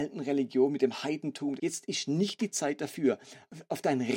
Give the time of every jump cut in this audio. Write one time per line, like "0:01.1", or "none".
0:01.6